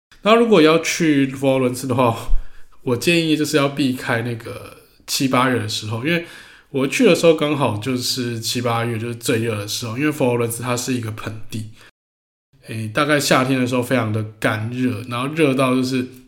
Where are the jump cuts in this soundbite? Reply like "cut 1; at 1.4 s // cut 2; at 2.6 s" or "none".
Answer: none